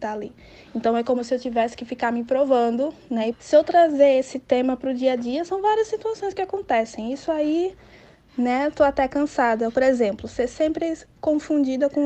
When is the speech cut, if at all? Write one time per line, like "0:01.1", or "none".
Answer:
0:03.3
0:09.7